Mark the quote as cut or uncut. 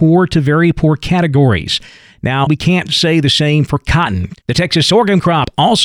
cut